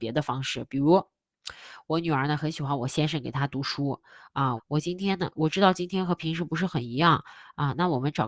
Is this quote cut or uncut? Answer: cut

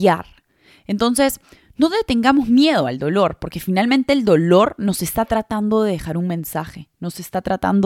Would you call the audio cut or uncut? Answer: uncut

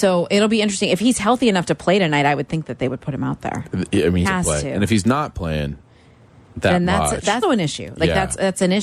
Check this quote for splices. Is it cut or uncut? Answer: cut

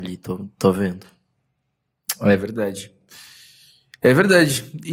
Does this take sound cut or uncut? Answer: uncut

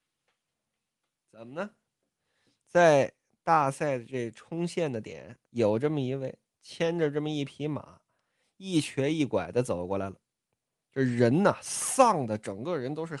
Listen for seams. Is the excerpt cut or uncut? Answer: cut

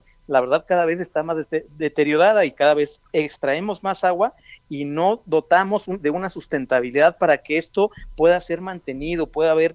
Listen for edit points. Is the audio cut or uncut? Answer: uncut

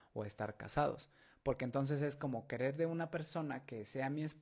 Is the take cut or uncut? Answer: uncut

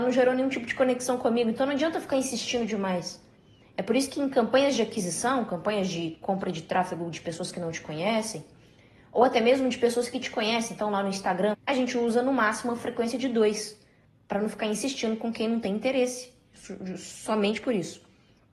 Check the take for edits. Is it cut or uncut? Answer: cut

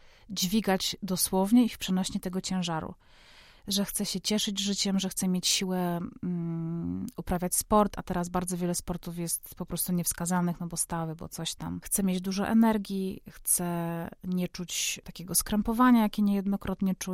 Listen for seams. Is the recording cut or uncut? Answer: uncut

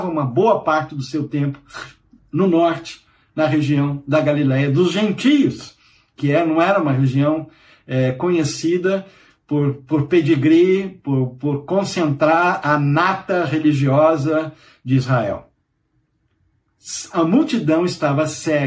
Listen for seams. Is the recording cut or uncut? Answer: uncut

